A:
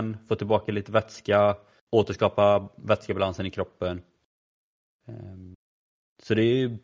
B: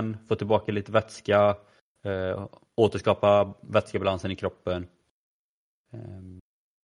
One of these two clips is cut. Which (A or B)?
A